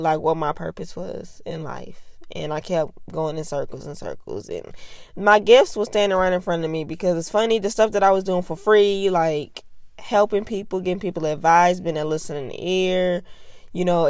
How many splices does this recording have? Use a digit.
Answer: 0